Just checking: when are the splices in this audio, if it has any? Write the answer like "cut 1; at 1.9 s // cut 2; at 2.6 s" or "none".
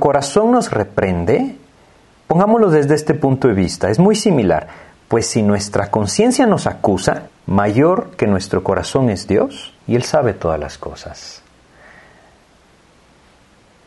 cut 1; at 7.3 s // cut 2; at 9.8 s